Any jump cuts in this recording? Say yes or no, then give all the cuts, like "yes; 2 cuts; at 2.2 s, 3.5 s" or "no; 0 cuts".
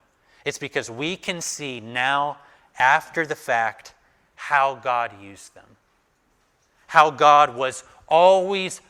no; 0 cuts